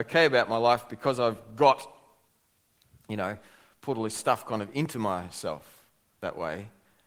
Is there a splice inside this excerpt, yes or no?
yes